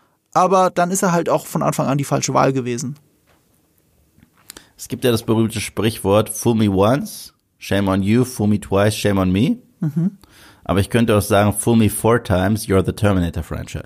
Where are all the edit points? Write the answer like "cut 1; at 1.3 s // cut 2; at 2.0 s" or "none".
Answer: none